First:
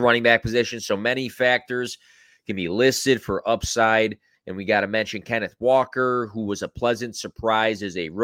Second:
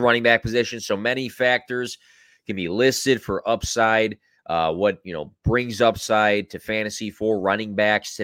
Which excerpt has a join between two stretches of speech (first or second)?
first